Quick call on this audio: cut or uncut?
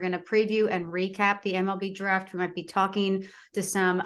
uncut